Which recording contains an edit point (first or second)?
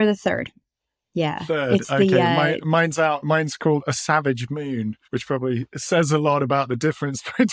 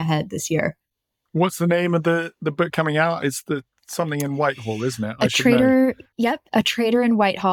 first